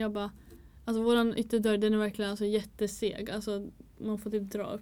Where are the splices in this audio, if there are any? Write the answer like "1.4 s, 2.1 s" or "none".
none

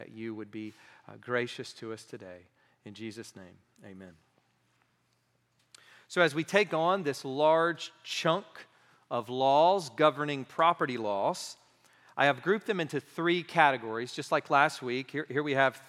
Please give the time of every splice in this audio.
none

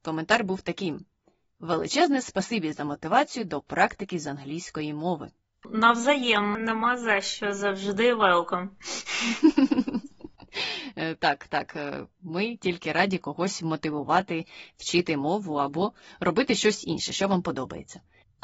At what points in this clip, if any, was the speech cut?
none

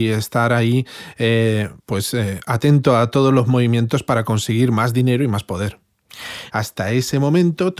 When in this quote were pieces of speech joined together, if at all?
1.8 s, 6.5 s

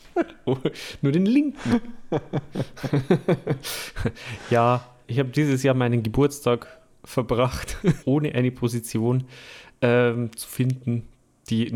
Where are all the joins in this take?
5.0 s, 8.0 s

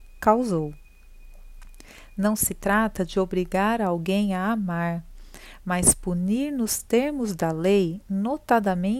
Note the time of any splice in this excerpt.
none

